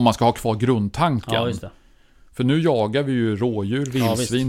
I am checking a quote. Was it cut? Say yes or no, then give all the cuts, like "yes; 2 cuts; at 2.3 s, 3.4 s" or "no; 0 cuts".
no; 0 cuts